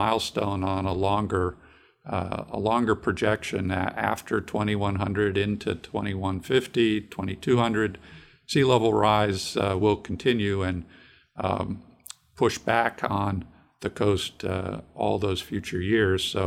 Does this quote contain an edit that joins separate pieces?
no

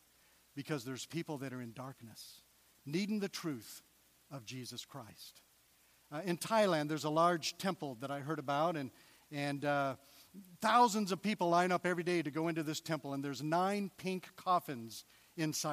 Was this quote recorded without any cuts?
yes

